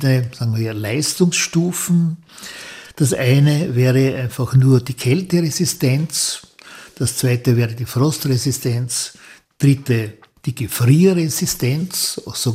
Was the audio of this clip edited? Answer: no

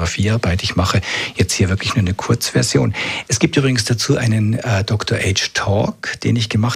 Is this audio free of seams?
no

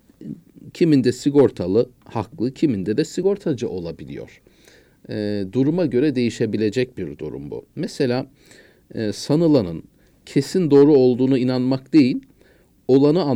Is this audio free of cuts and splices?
yes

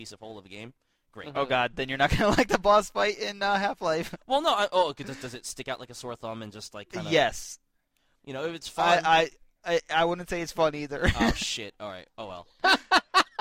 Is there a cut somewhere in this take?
yes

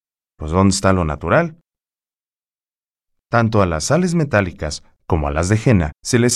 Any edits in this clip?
no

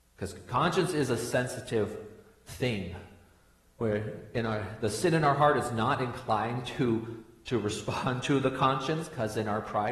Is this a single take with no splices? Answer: yes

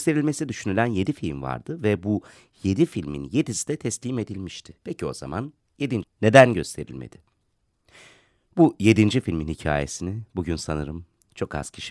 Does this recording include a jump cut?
yes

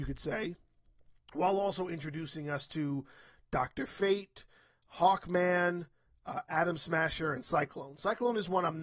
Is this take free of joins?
yes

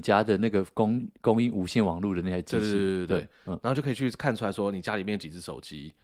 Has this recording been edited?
no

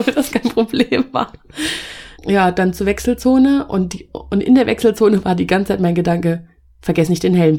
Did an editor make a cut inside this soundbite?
yes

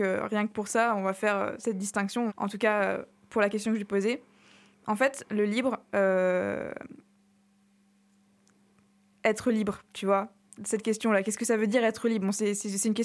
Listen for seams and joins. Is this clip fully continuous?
no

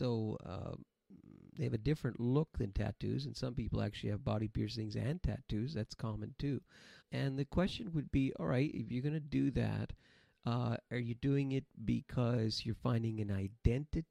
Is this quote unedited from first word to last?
no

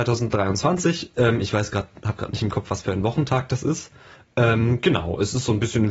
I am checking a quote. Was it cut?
no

